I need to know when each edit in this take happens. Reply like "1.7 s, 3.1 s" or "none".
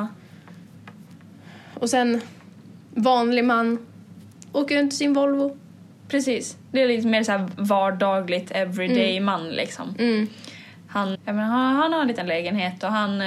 2.8 s, 11.1 s